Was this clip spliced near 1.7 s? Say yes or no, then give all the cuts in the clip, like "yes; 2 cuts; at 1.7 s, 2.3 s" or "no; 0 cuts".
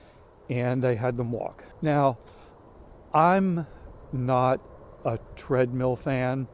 yes; 1 cut; at 1.7 s